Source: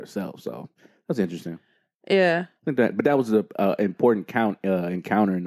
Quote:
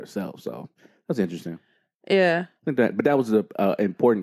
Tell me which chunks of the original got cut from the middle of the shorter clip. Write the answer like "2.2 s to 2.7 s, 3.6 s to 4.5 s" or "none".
none